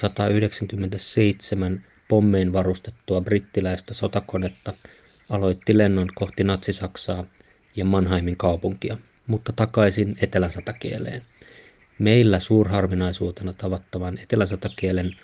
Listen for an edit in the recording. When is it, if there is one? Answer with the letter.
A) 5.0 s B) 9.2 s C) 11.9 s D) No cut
B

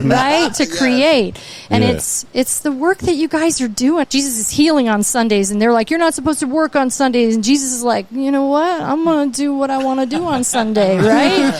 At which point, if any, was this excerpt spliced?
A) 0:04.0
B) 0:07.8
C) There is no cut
A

